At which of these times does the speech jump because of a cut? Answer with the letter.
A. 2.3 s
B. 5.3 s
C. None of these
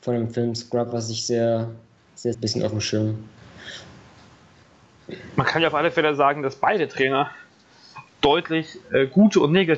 A